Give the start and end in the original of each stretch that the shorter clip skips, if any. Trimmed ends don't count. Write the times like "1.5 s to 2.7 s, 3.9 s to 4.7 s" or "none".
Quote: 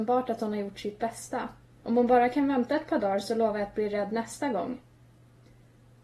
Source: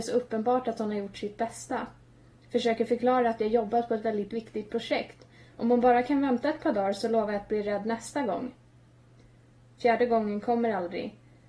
2.2 s to 5.5 s